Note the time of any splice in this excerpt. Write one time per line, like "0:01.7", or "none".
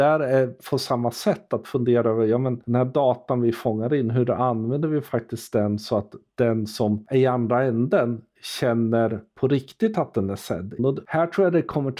0:10.8